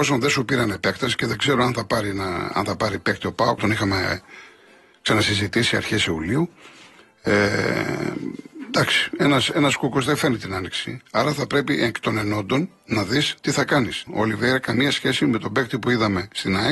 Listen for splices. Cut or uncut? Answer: cut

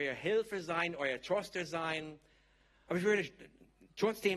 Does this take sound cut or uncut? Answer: cut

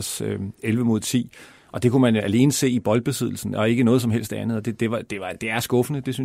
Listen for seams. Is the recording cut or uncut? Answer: uncut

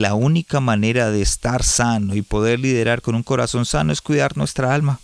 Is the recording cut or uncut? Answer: uncut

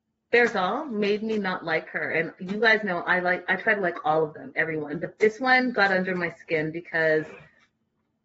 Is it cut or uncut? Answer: uncut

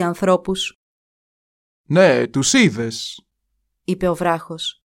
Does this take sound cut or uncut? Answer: uncut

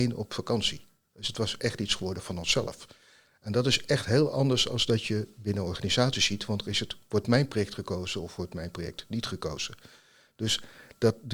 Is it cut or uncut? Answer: uncut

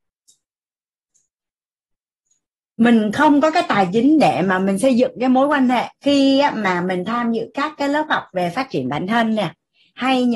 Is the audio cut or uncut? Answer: cut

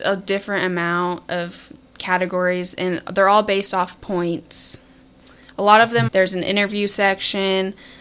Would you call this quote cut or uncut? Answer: cut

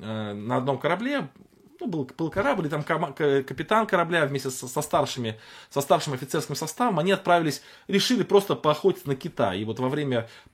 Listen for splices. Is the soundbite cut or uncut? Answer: uncut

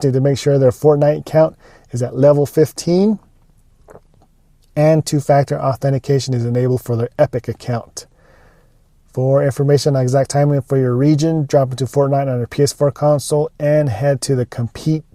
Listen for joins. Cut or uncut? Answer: uncut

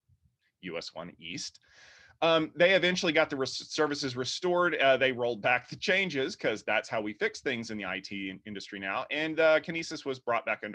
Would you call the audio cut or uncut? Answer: uncut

